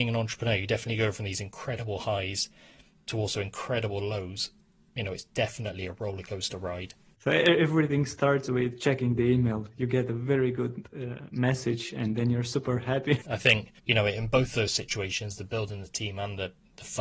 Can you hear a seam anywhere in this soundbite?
yes; 2 cuts; at 7.2 s, 13.2 s

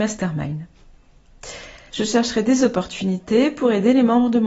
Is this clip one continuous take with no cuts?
no; 1 cut; at 1.9 s

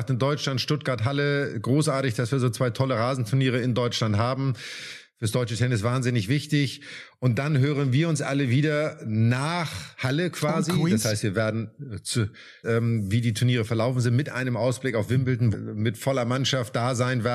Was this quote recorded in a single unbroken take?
no; 2 cuts; at 12.6 s, 15.5 s

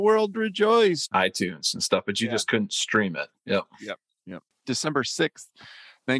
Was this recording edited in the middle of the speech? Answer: yes; 1 cut; at 1.1 s

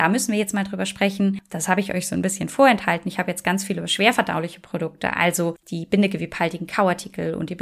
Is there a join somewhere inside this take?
no; 0 cuts

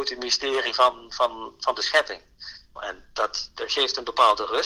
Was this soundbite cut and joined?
yes; 1 cut; at 2.8 s

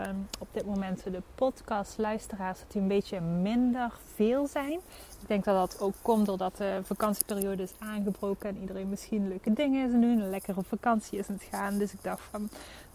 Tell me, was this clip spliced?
no; 0 cuts

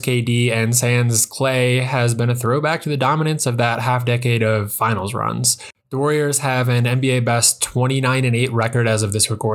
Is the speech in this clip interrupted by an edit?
no; 0 cuts

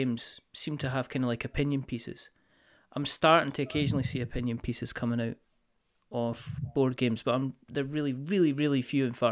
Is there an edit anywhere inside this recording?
no; 0 cuts

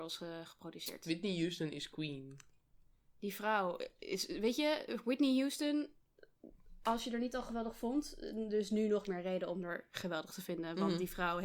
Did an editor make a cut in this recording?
no; 0 cuts

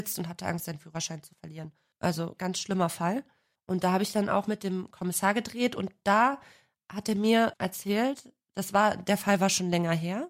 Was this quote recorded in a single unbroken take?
no; 1 cut; at 1.9 s

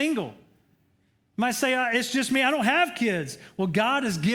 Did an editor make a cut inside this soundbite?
no; 0 cuts

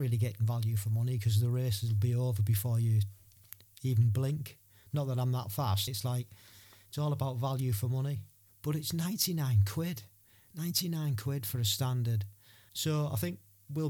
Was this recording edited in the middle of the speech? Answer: yes; 3 cuts; at 5.9 s, 8.5 s, 12.7 s

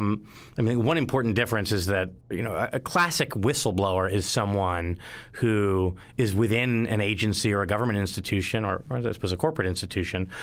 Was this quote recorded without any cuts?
no; 1 cut; at 2.2 s

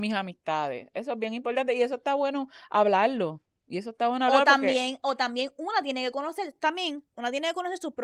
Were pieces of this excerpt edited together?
no; 0 cuts

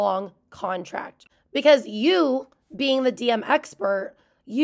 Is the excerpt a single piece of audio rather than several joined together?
yes; 0 cuts

